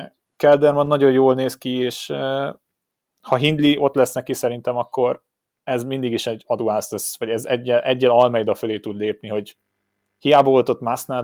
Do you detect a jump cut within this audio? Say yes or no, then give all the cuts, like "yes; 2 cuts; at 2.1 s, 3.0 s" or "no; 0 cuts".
no; 0 cuts